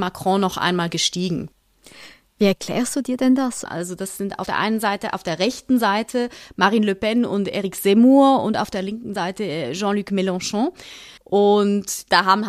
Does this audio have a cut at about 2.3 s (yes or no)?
no